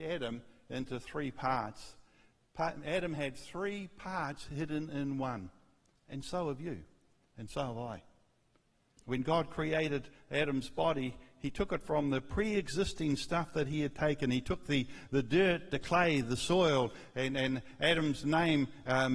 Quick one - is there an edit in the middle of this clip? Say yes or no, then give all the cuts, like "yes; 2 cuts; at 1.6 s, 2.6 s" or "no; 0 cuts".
yes; 1 cut; at 9.0 s